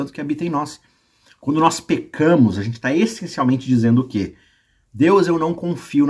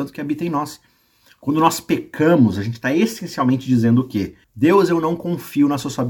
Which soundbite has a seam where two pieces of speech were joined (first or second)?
second